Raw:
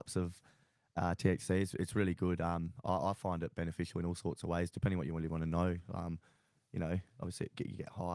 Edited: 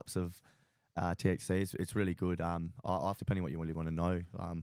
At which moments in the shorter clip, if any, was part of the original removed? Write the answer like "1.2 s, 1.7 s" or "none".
3.2 s